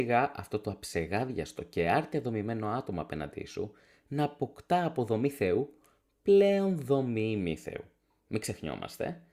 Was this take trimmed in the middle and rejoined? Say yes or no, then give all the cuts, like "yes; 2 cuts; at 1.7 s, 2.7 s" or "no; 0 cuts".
no; 0 cuts